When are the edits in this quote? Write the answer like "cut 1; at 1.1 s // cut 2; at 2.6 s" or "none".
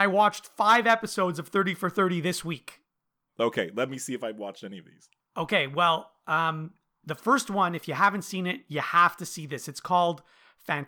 none